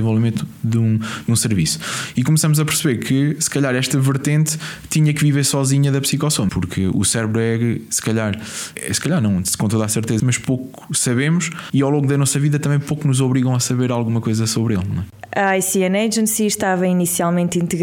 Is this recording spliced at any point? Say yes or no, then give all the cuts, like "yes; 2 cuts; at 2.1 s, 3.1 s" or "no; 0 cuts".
yes; 2 cuts; at 6.5 s, 10.2 s